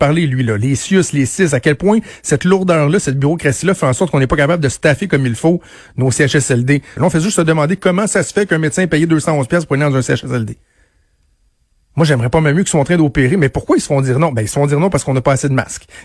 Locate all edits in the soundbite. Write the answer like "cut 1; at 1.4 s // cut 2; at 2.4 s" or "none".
cut 1; at 7.0 s // cut 2; at 11.9 s